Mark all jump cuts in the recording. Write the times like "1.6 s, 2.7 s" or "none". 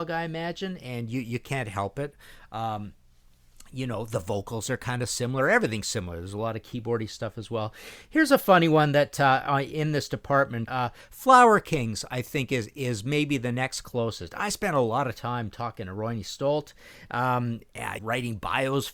10.7 s, 18.0 s